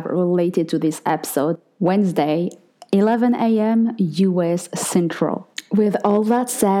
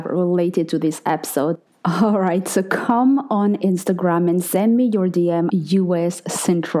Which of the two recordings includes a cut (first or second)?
second